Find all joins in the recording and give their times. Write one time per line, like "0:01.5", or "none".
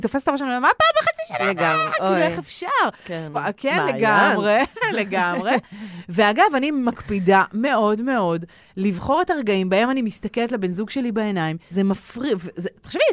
0:03.3
0:11.7

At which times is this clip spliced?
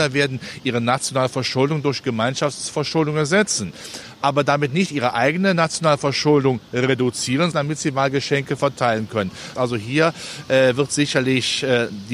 0:07.5
0:09.6

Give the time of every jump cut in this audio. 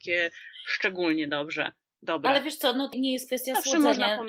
0:02.9

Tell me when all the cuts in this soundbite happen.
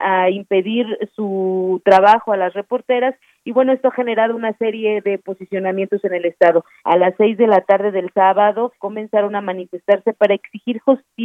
0:06.8
0:08.8

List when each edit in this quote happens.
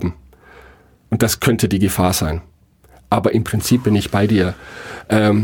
none

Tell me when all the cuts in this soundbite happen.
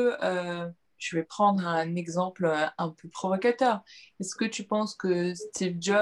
0:01.0

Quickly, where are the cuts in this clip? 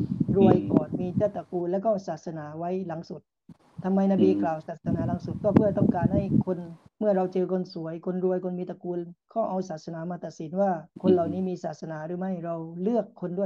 0:06.9
0:10.9

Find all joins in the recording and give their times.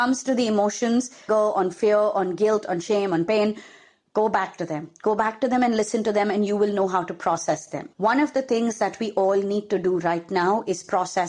0:01.3
0:07.9

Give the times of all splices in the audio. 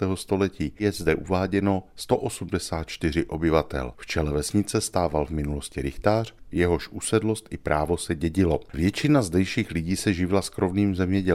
none

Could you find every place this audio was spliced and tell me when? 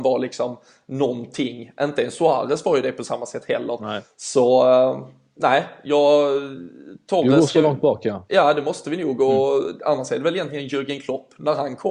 none

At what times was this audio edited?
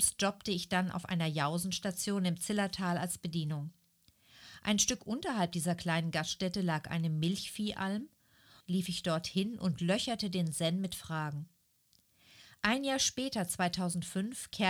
0:08.6

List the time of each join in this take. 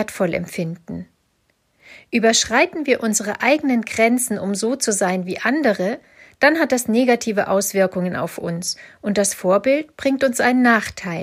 none

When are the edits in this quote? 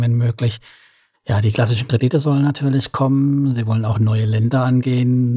none

